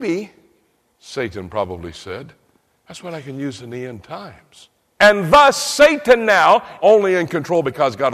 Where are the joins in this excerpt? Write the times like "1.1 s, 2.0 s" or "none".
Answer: 5.0 s, 6.8 s